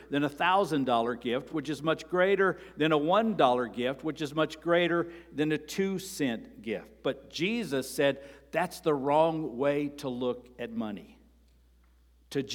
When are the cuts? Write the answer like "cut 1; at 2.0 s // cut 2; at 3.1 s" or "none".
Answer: none